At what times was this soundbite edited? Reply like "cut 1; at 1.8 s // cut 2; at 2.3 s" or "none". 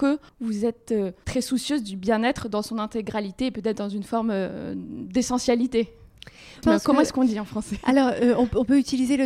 cut 1; at 6.6 s